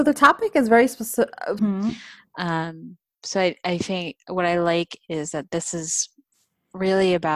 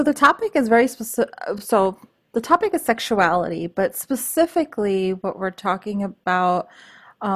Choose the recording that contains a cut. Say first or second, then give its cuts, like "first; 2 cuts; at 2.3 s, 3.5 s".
first; 1 cut; at 1.6 s